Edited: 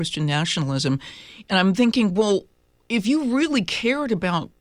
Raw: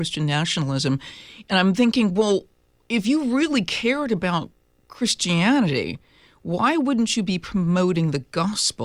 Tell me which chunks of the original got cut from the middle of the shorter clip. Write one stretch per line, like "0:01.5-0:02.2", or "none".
none